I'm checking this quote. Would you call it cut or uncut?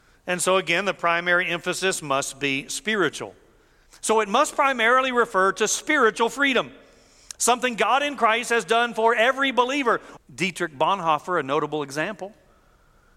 cut